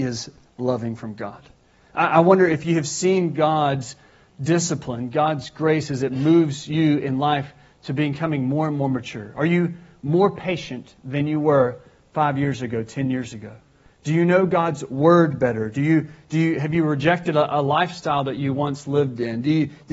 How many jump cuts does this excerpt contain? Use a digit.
0